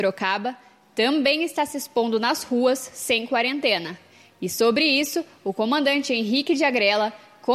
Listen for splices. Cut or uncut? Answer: uncut